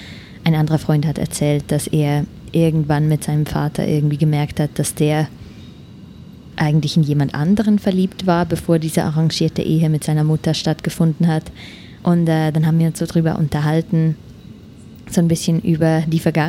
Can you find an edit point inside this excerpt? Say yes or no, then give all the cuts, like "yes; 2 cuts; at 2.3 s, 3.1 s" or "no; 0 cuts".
yes; 1 cut; at 12.0 s